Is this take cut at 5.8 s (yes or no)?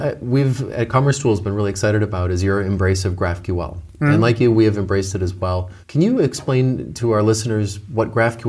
yes